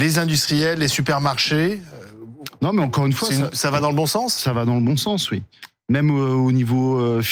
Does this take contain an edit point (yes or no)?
no